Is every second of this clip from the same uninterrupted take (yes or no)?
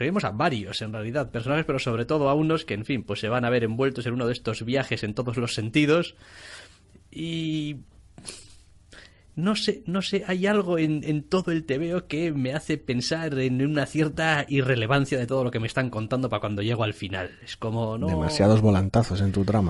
yes